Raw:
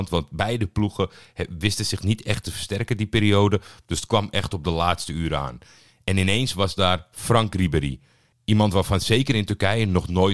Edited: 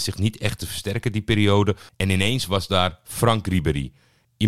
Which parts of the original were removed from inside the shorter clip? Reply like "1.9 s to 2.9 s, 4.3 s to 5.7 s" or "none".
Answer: 3.7 s to 6.0 s